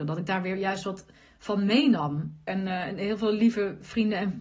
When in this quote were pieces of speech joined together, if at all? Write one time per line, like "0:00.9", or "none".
0:02.5

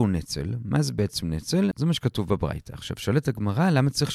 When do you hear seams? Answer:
0:01.7

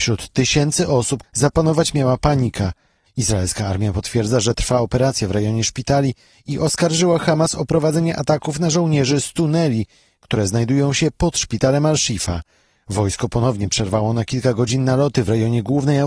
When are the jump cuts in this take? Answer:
0:01.2
0:03.1

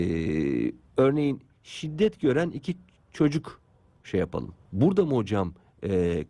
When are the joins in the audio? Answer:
0:04.6

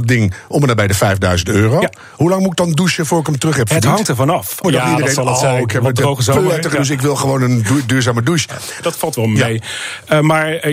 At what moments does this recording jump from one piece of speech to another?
0:04.6
0:08.8

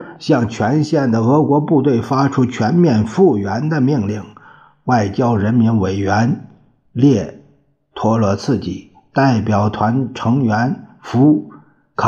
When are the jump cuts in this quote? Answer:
none

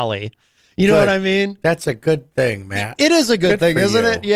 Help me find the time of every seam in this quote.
none

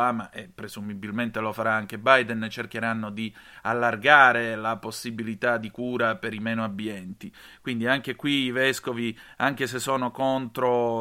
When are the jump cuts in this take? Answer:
none

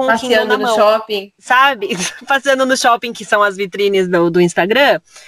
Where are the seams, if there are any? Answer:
none

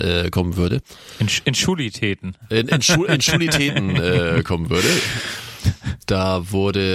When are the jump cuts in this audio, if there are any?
none

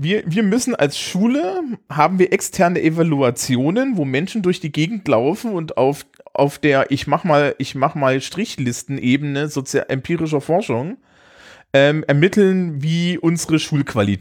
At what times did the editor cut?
none

